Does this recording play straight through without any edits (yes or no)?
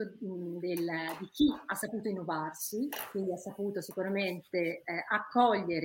yes